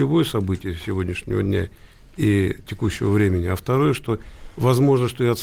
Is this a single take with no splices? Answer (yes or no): yes